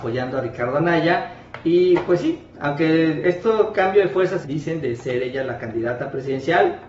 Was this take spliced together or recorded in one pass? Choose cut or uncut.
cut